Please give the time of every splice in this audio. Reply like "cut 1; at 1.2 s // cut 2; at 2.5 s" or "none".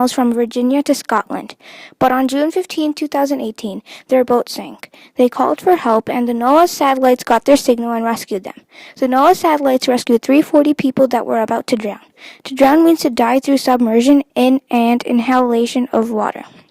cut 1; at 14.3 s